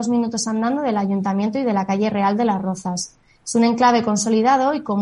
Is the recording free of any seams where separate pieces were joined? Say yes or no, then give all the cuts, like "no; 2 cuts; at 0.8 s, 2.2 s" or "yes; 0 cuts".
yes; 0 cuts